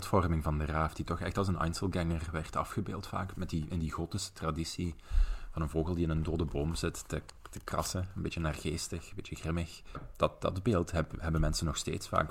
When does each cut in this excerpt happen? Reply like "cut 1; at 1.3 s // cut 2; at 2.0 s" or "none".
cut 1; at 9.9 s